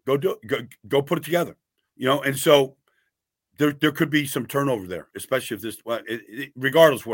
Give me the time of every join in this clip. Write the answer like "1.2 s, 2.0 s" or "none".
none